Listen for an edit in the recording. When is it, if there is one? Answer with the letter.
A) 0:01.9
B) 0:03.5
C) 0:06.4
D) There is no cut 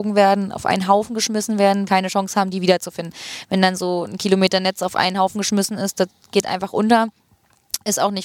A